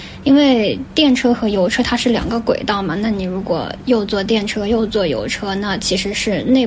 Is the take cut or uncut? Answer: uncut